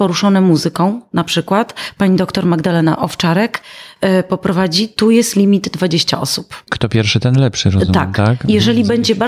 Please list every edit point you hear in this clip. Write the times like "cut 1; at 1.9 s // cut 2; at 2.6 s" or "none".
none